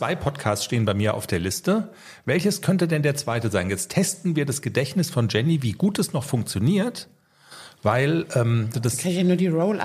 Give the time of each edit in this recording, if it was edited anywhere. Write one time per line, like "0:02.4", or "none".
0:08.7